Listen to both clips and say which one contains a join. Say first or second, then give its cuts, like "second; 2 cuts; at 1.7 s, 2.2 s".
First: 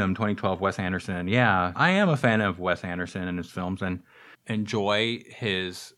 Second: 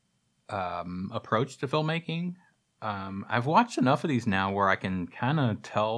first; 2 cuts; at 1.8 s, 4.3 s